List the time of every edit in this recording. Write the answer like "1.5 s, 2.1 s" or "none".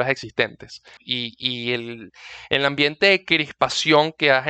1.0 s